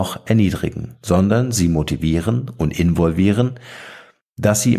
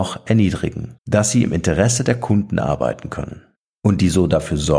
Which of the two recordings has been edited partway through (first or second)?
second